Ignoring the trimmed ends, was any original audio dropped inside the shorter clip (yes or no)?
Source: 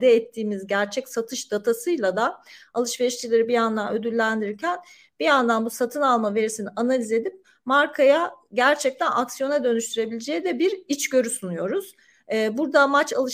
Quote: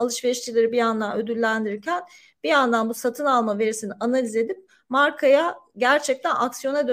no